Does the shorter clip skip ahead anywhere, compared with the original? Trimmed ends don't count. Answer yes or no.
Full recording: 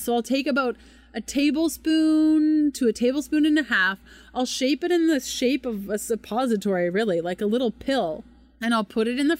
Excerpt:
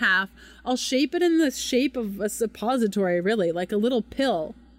no